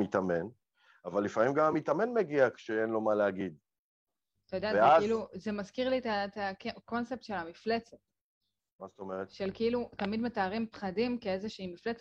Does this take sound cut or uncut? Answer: uncut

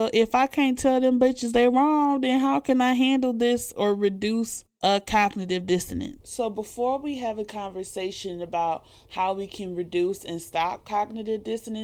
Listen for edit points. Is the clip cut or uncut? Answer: uncut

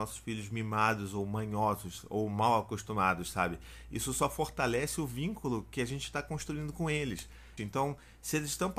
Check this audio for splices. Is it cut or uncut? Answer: cut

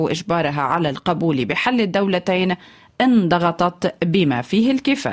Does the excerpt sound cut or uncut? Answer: uncut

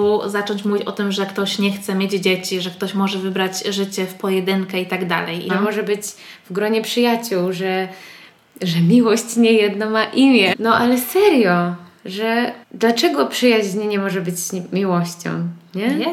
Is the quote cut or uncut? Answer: cut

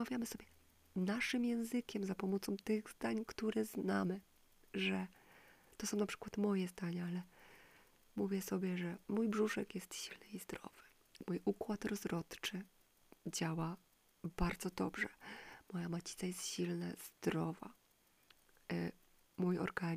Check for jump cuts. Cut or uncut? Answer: uncut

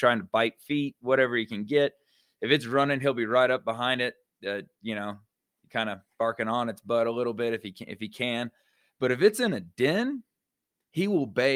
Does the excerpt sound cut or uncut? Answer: uncut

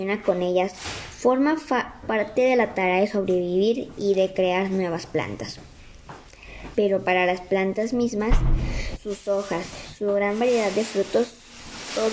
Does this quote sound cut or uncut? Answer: cut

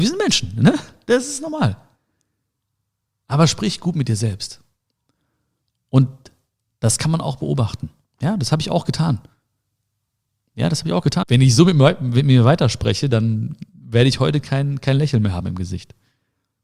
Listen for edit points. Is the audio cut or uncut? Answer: cut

